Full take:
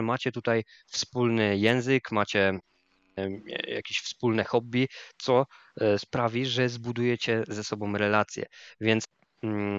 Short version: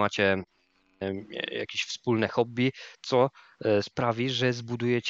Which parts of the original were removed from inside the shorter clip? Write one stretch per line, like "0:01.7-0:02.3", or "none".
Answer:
none